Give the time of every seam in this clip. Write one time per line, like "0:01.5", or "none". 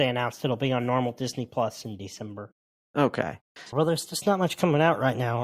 0:03.7

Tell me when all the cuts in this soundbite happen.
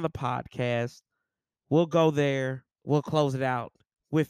0:02.7

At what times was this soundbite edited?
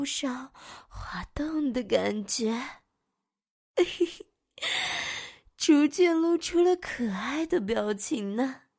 none

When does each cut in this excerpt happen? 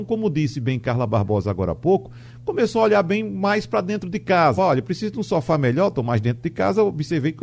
0:04.6

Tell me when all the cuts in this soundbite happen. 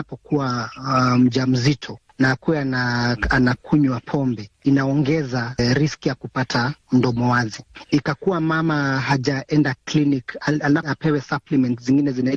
none

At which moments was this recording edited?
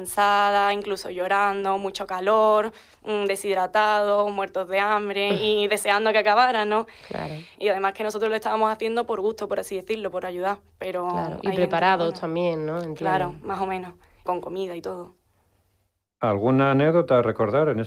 0:07.6
0:14.3

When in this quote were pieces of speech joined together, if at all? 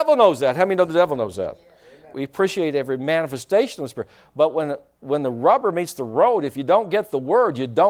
0:02.1

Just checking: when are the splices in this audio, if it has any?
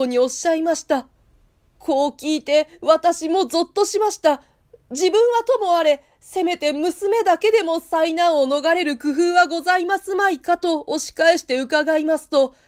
none

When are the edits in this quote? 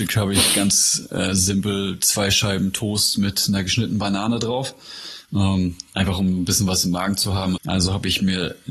0:07.6

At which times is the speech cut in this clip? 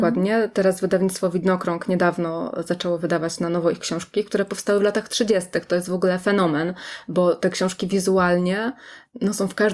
none

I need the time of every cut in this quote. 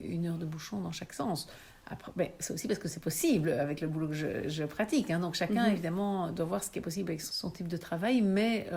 none

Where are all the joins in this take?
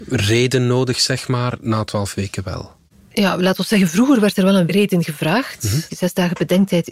0:05.9

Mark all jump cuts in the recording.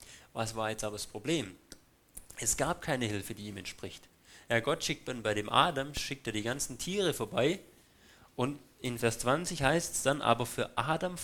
none

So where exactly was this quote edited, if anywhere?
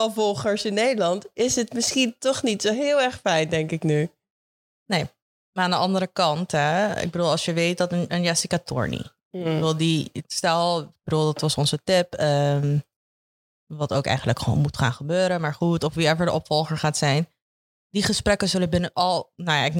none

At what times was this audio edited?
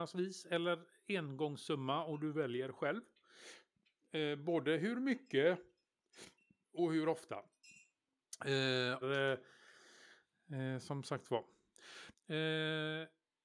0:09.0
0:12.1

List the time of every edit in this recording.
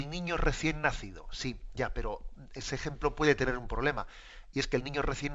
none

